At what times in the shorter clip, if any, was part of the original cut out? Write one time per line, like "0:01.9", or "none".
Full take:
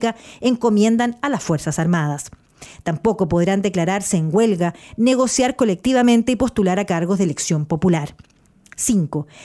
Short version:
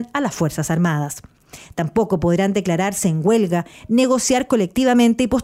none